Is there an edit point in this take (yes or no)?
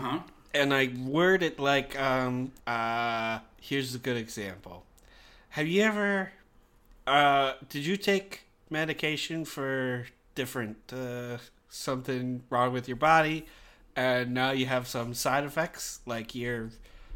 yes